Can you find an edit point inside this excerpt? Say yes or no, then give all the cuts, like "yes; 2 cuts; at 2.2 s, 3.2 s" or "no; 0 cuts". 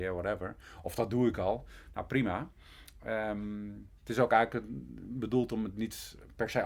yes; 1 cut; at 4.0 s